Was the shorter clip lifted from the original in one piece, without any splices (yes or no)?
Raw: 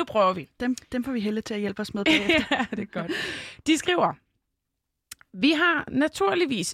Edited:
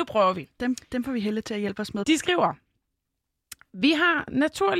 no